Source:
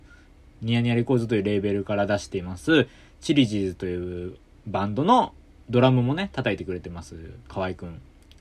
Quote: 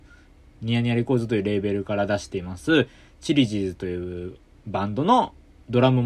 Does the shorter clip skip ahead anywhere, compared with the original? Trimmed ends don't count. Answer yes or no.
no